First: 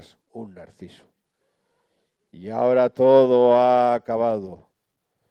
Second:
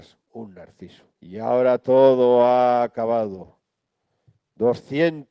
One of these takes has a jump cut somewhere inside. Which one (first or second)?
second